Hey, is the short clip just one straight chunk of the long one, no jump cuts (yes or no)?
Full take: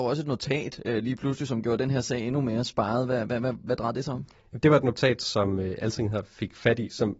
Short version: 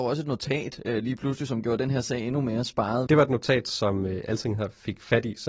no